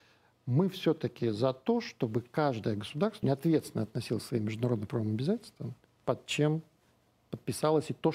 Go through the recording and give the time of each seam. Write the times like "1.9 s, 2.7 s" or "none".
3.2 s, 5.8 s